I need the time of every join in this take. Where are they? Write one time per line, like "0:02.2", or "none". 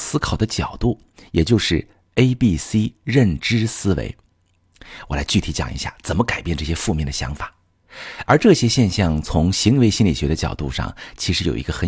0:08.3